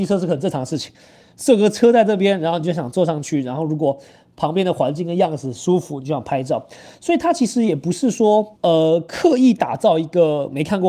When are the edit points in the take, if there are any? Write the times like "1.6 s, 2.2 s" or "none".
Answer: 8.6 s